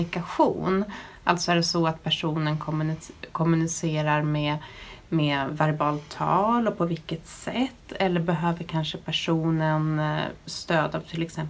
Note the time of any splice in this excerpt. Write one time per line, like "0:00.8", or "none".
none